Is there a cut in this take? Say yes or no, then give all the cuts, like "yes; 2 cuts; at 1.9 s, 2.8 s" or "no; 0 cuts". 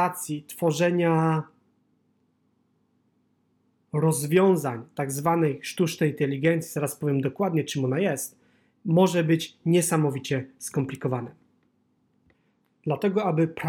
no; 0 cuts